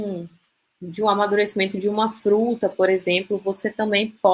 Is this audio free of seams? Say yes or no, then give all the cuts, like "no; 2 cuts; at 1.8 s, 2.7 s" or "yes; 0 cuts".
yes; 0 cuts